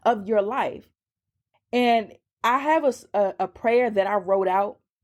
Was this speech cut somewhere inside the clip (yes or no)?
yes